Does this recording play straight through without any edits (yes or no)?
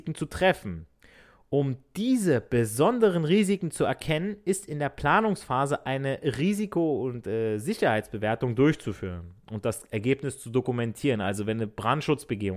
yes